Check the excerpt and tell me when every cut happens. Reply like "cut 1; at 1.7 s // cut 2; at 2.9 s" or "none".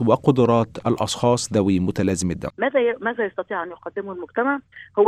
cut 1; at 2.5 s